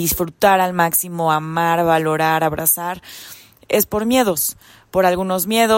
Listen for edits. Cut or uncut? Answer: uncut